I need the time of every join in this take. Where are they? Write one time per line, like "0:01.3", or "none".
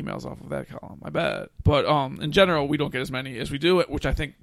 0:01.5